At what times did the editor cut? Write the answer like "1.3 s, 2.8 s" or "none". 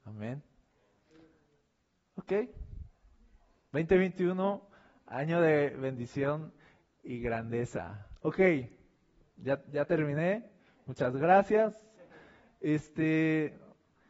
none